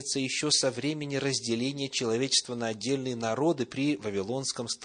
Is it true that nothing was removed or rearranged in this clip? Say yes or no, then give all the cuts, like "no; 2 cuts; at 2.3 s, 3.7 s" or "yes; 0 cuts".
yes; 0 cuts